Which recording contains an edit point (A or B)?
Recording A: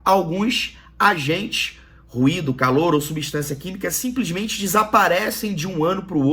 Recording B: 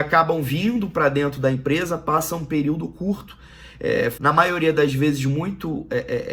B